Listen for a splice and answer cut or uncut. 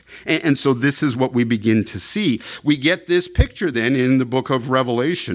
uncut